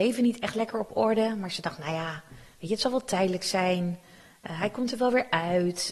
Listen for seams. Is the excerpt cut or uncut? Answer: uncut